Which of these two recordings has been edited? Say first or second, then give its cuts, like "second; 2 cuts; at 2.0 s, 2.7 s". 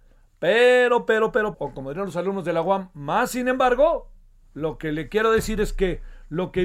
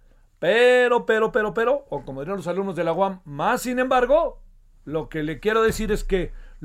first; 1 cut; at 1.5 s